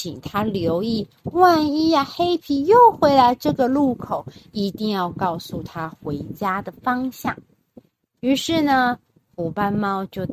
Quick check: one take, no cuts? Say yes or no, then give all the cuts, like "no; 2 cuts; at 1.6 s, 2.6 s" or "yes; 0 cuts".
yes; 0 cuts